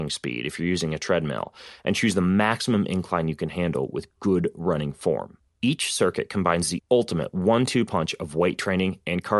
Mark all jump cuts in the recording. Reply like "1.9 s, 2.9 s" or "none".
5.5 s